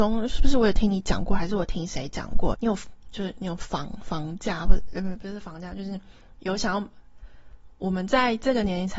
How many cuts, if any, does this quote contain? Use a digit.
1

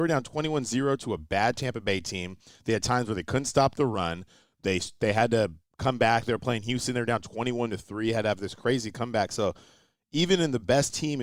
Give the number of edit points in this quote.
0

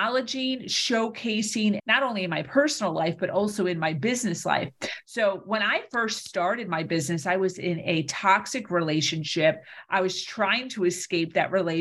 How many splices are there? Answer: 1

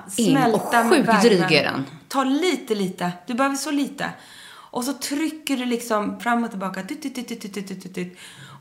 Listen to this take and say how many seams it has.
2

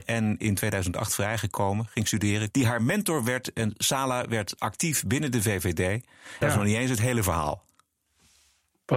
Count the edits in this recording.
2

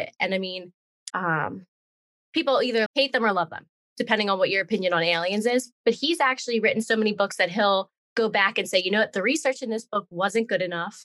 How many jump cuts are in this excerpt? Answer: 2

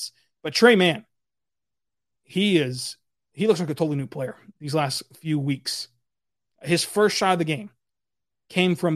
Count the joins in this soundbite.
0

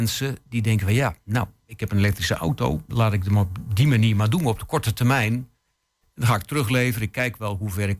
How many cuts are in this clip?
1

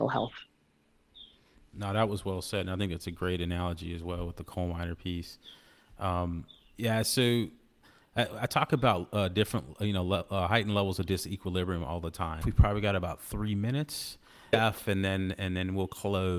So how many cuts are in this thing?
2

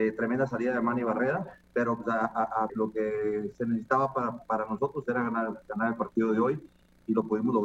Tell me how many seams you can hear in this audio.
1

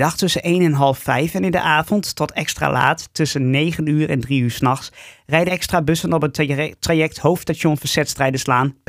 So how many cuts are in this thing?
1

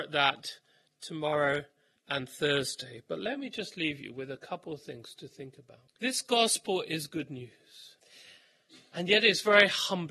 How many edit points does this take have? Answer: 0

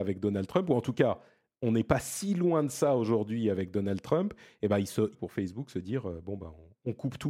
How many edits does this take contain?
1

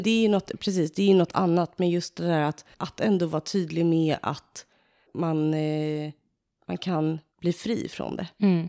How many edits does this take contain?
2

